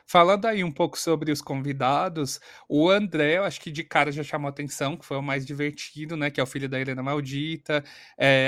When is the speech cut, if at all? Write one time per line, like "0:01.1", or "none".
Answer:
none